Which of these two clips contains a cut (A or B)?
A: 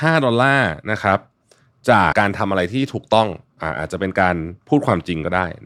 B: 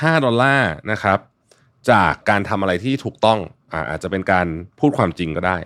A